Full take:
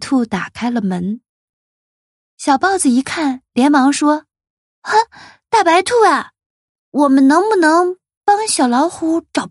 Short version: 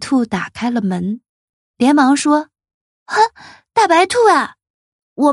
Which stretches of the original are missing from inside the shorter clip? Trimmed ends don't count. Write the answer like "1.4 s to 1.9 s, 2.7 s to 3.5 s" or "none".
1.7 s to 3.5 s